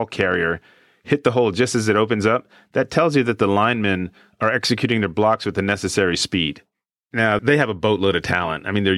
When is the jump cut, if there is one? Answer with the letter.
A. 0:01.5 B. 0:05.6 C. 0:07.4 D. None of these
C